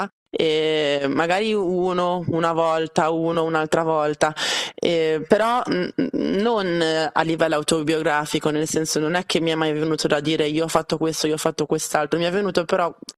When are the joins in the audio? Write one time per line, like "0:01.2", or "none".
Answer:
none